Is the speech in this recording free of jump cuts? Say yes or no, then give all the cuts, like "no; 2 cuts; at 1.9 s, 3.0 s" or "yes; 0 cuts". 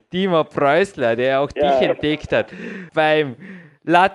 no; 1 cut; at 2.9 s